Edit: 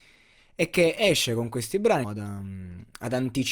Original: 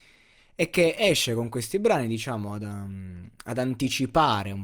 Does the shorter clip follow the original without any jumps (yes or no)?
no